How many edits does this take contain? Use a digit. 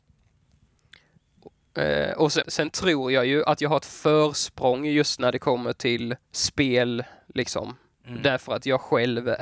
2